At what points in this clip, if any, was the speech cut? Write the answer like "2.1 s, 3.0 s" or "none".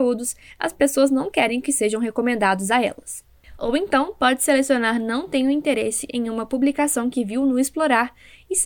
3.6 s